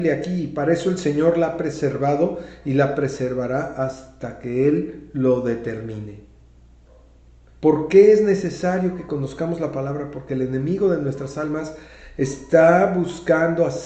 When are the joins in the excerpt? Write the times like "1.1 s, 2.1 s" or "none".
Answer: 7.5 s